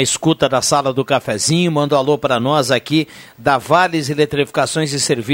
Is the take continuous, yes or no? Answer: yes